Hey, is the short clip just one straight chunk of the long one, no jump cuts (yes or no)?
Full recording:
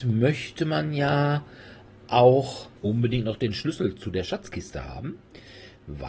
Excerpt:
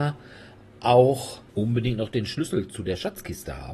yes